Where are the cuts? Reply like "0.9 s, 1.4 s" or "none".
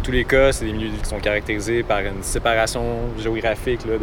1.0 s

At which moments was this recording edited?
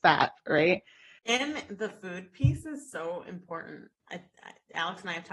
1.2 s

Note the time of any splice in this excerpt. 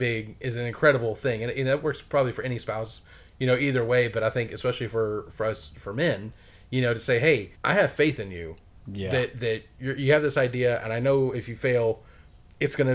7.5 s

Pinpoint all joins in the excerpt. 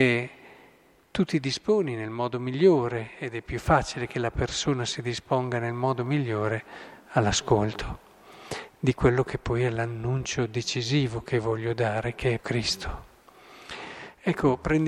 12.4 s

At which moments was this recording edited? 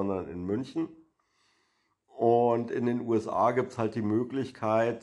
none

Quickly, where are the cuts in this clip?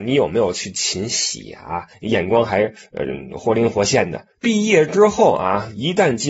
1.9 s, 4.4 s

